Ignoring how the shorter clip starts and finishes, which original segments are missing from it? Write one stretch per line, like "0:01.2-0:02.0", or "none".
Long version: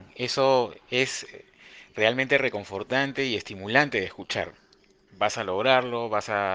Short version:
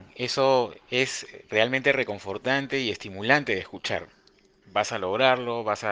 0:01.4-0:01.9